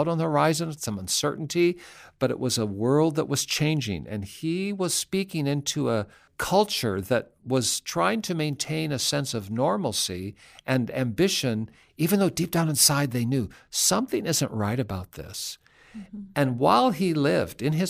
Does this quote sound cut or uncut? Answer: uncut